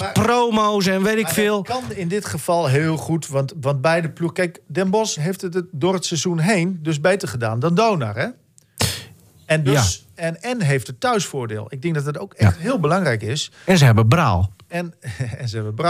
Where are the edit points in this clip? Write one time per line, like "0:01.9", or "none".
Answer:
0:05.2
0:09.7